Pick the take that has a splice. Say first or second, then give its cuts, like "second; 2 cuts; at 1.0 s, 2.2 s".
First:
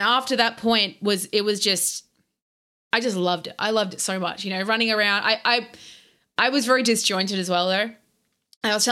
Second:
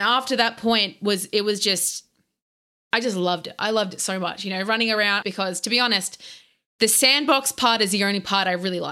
second; 1 cut; at 5.2 s